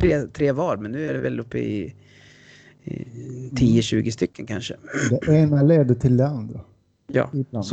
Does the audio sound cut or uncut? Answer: uncut